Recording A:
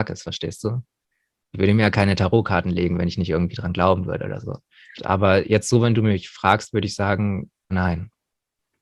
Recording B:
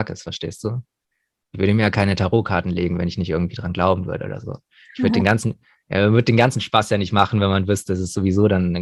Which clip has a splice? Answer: A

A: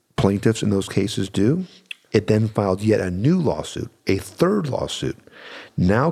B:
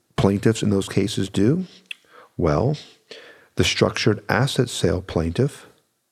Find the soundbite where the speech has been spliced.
A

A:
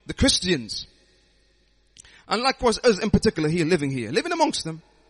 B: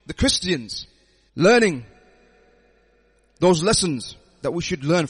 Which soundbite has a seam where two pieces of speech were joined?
B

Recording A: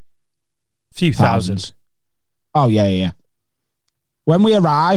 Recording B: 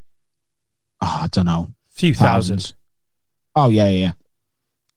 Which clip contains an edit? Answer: A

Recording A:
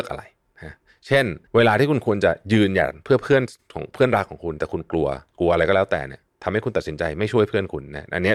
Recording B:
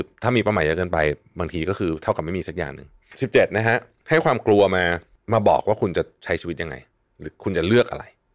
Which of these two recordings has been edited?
A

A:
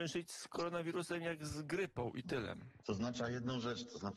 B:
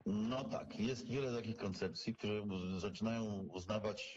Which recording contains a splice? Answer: A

